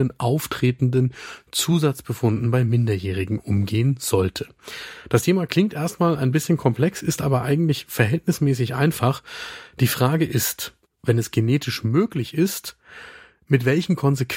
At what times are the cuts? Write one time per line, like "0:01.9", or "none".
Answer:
0:10.9